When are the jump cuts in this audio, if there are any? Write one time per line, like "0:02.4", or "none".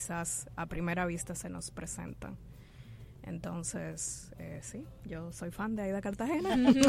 none